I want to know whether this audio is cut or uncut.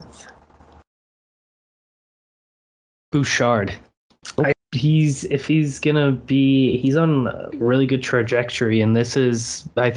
cut